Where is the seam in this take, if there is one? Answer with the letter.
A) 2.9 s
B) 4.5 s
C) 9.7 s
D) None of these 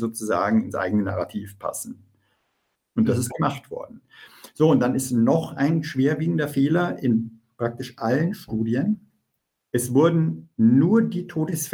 D